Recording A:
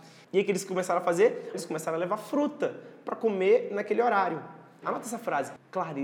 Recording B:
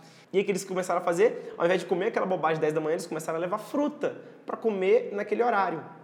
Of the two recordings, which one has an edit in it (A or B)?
A